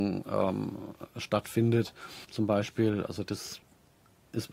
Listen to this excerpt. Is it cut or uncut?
cut